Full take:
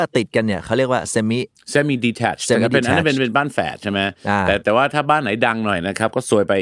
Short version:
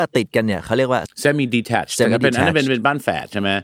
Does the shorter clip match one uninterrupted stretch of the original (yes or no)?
no